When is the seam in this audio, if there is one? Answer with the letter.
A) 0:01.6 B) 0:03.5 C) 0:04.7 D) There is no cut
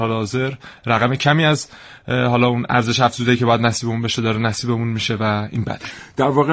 D